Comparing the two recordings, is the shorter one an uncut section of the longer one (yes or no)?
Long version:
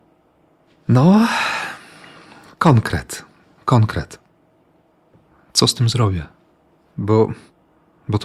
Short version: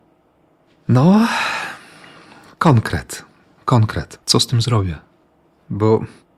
no